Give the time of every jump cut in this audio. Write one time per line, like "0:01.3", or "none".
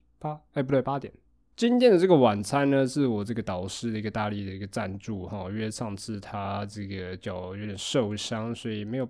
0:01.5